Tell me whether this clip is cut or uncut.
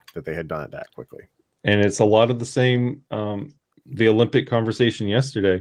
cut